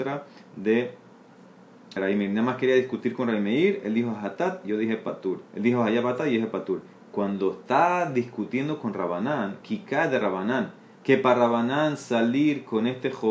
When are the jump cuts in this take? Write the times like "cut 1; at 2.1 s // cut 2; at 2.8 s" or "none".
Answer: cut 1; at 2.0 s // cut 2; at 5.5 s // cut 3; at 9.6 s